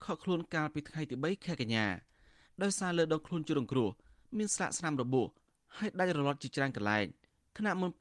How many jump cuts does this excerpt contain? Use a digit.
0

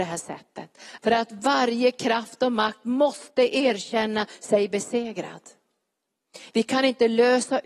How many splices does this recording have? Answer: 2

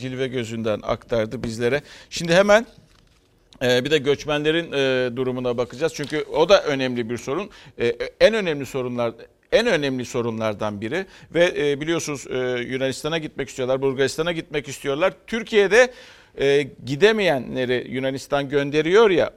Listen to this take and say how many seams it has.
0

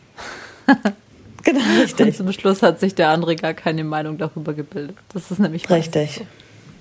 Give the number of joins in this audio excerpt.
0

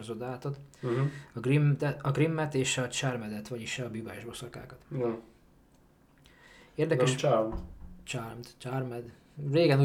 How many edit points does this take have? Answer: 0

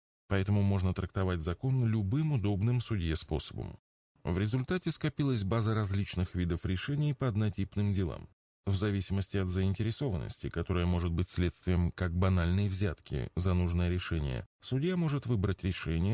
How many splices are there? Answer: 1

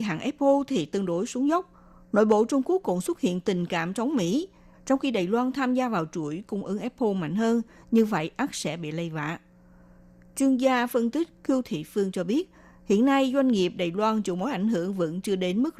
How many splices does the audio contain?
1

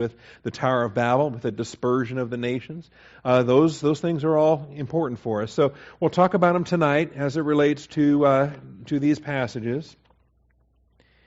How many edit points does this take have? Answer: 0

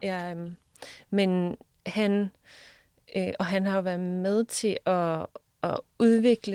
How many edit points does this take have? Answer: 0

